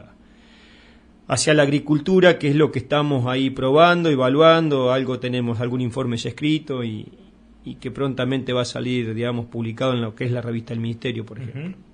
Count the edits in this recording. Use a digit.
0